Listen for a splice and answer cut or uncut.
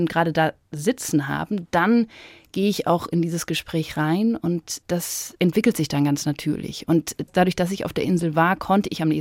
uncut